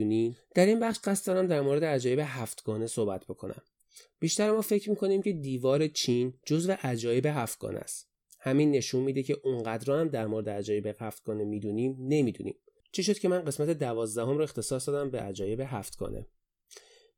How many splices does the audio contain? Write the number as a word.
zero